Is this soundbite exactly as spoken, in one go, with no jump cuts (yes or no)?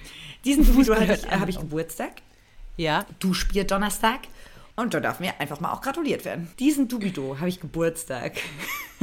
no